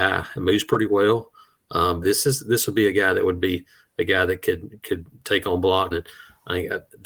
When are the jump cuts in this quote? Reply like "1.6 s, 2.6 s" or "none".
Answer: 2.0 s, 5.9 s

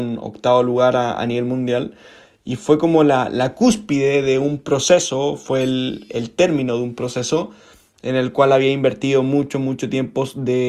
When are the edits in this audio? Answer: 6.1 s

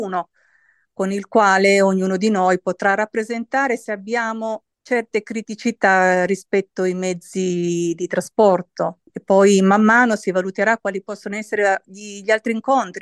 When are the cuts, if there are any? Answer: 9.1 s

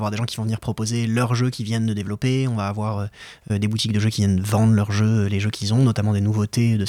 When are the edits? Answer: none

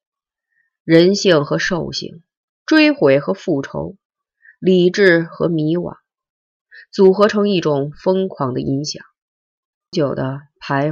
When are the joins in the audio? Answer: 9.9 s

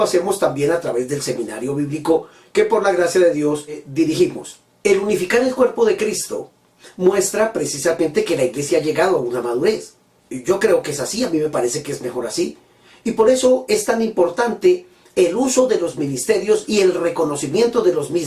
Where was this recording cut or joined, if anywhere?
10.2 s

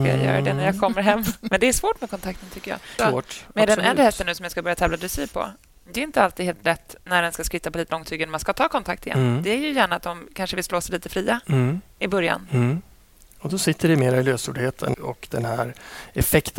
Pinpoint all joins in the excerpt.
3.0 s, 14.9 s

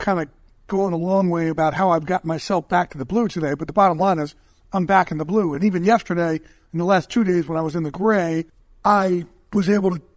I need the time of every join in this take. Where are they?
none

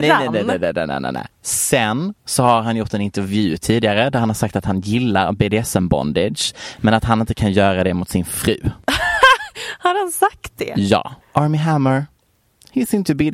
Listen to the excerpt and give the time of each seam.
11.2 s

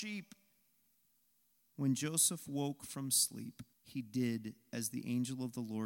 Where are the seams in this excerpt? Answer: 1.7 s, 3.7 s

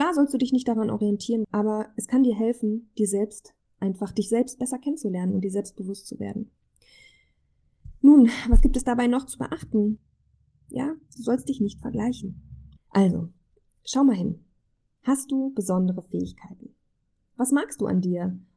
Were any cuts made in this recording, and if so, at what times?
1.4 s, 12.8 s

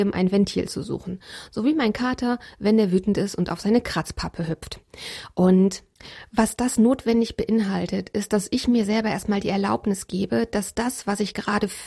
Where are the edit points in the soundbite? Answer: none

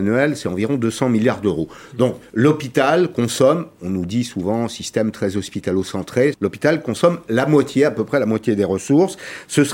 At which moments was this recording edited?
6.3 s

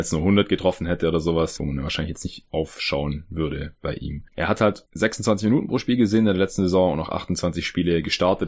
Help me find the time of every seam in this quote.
1.6 s

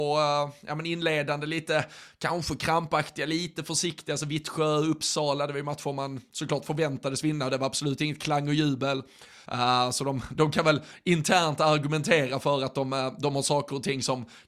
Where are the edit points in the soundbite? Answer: 9.4 s

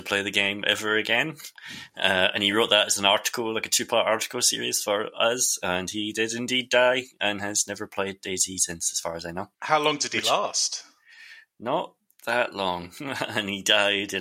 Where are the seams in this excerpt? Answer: 9.5 s

